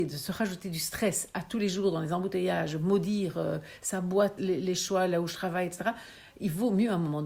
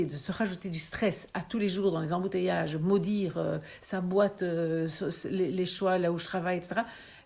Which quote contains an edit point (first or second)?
first